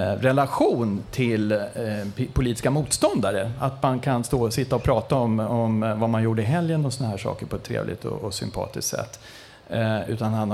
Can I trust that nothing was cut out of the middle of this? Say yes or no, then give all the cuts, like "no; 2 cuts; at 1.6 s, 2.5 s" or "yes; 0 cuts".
yes; 0 cuts